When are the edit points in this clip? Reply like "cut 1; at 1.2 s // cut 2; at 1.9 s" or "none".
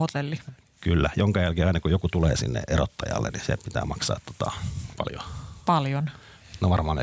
none